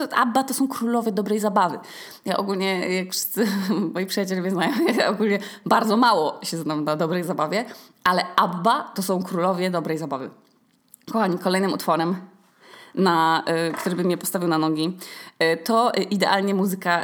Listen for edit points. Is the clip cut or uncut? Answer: uncut